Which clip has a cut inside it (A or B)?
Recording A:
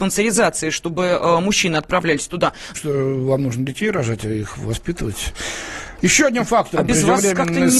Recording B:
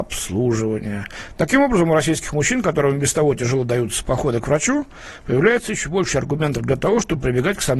A